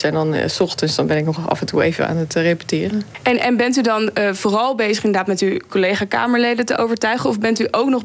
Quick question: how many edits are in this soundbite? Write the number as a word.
zero